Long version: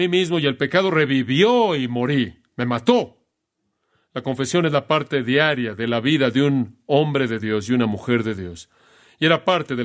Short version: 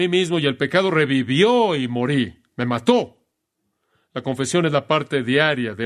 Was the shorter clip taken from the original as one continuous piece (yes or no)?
yes